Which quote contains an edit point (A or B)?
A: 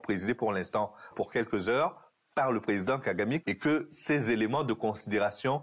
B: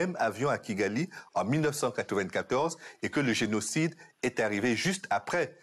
A